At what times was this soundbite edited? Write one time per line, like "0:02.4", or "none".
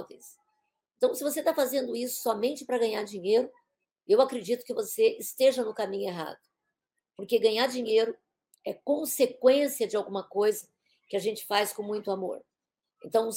none